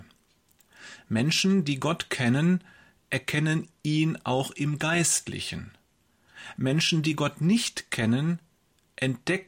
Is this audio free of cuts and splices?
yes; 0 cuts

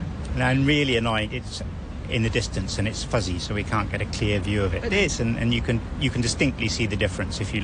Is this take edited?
yes; 2 cuts; at 1.3 s, 4.9 s

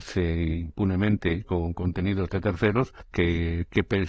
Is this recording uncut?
yes; 0 cuts

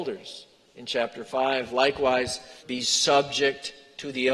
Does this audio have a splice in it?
yes; 1 cut; at 2.6 s

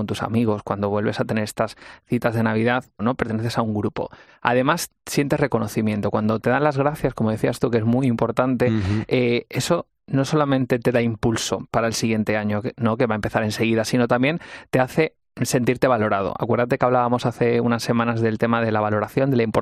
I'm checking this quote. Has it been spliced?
yes; 1 cut; at 3.0 s

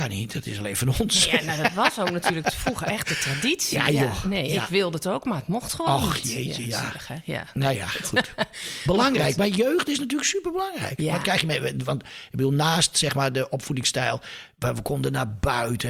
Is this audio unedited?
yes; 0 cuts

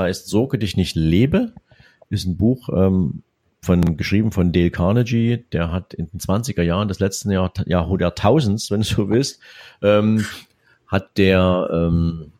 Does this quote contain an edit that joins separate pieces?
no; 0 cuts

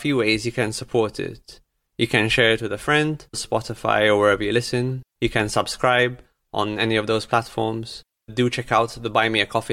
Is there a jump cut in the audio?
yes; 2 cuts; at 3.3 s, 8.3 s

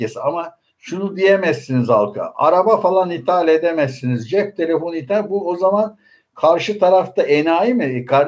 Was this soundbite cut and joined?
no; 0 cuts

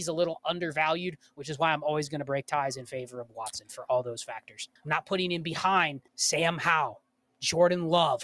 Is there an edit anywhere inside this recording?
yes; 2 cuts; at 4.8 s, 6.1 s

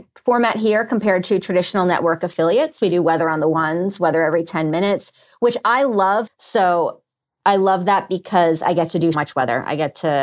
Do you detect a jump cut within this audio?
yes; 2 cuts; at 6.3 s, 9.1 s

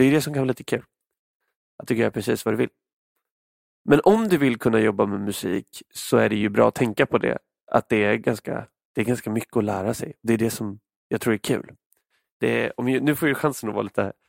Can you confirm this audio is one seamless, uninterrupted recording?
yes; 0 cuts

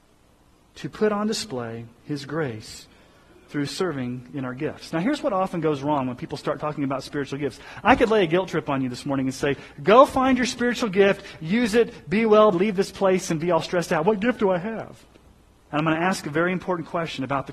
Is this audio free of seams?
no; 2 cuts; at 12.5 s, 15.7 s

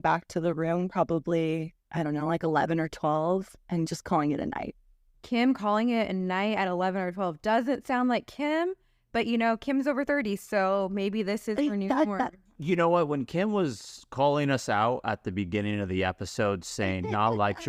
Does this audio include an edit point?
no; 0 cuts

